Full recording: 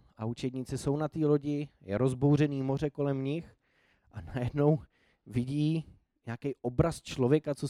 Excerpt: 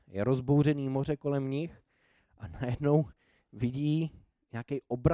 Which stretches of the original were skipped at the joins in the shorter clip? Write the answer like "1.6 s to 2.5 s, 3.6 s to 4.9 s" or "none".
none